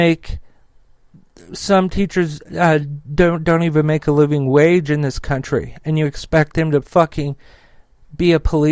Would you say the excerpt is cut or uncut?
uncut